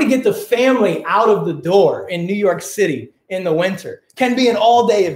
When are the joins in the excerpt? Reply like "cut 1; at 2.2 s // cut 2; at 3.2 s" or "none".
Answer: none